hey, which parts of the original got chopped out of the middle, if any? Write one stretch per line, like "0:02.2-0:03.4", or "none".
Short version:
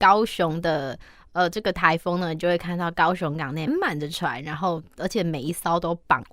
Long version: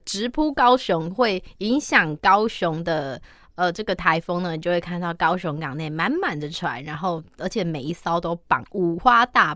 0:05.9-0:06.1